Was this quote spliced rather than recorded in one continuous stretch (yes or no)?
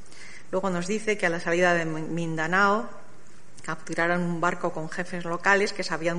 no